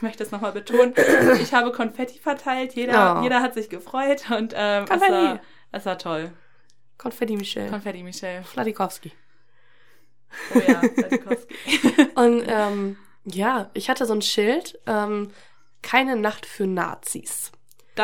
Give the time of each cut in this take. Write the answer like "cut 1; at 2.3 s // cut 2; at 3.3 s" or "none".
none

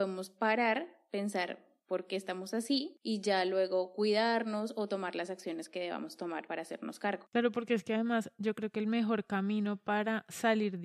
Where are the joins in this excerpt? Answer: none

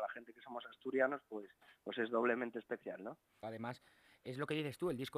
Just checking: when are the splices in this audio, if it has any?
cut 1; at 3.4 s

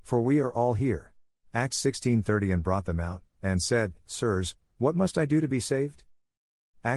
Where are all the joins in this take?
cut 1; at 1.3 s

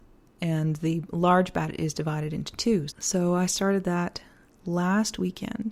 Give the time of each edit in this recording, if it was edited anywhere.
cut 1; at 2.9 s

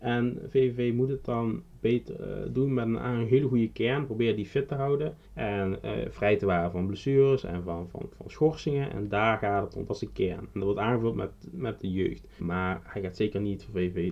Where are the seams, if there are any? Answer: cut 1; at 5.2 s // cut 2; at 12.4 s

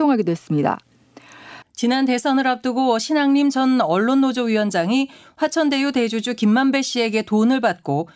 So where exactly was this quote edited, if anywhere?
cut 1; at 1.6 s

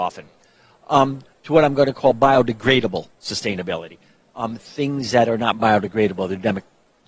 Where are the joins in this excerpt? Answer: none

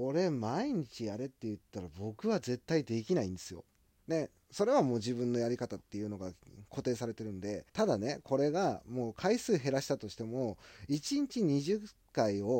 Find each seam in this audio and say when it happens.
cut 1; at 4.0 s // cut 2; at 7.7 s

